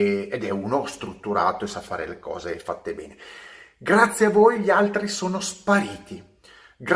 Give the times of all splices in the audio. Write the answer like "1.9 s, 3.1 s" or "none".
none

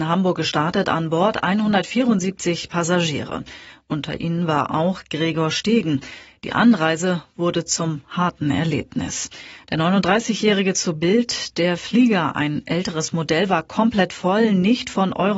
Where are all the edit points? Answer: none

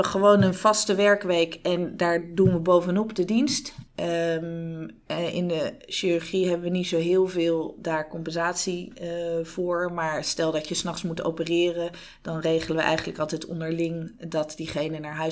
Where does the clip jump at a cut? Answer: 3.9 s

